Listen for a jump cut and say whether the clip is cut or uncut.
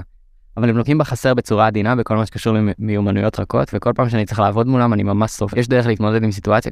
cut